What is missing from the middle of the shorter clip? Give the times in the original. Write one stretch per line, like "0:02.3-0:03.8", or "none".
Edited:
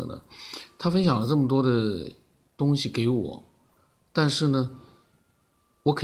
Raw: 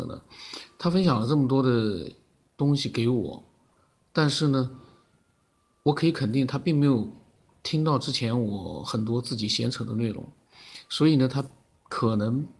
none